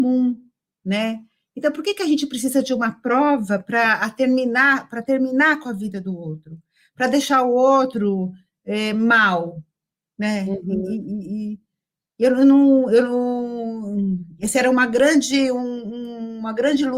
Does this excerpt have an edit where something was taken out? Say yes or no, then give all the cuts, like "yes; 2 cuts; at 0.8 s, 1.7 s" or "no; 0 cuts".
no; 0 cuts